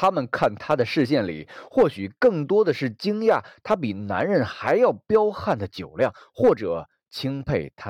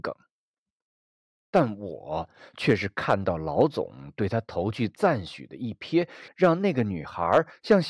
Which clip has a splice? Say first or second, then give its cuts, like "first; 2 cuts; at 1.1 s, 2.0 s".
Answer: second; 1 cut; at 6.3 s